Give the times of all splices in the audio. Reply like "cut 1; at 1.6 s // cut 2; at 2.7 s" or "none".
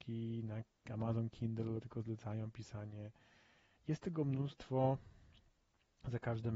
cut 1; at 1.8 s // cut 2; at 3.8 s

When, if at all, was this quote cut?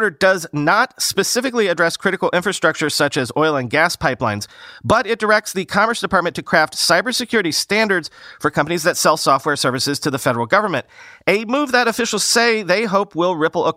none

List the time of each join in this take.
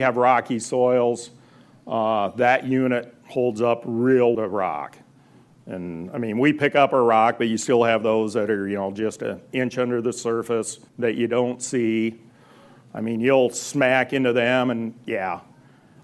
cut 1; at 4.3 s // cut 2; at 10.9 s

